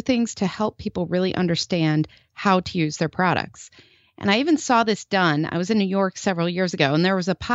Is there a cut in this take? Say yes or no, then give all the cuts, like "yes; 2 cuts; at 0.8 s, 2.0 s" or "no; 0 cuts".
no; 0 cuts